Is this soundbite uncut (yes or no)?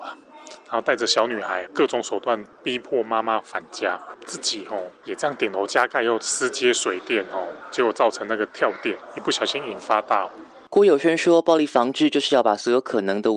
no